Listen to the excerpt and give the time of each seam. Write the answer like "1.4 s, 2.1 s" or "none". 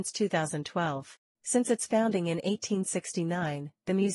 1.2 s